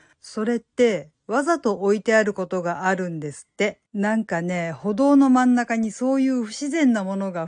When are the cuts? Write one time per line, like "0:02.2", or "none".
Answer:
0:03.9